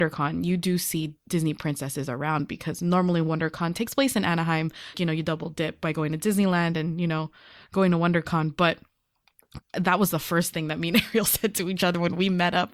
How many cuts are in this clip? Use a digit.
2